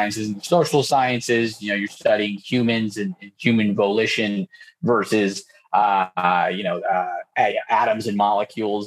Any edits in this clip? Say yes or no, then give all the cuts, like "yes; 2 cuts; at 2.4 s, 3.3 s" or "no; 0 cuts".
no; 0 cuts